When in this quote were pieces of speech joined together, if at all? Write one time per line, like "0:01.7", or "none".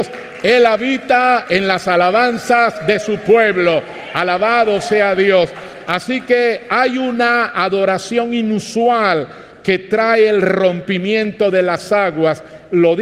none